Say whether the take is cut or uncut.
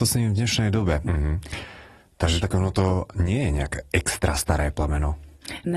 cut